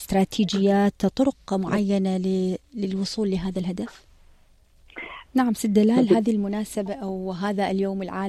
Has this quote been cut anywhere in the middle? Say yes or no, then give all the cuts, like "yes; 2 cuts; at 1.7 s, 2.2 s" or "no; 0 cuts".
yes; 1 cut; at 5.3 s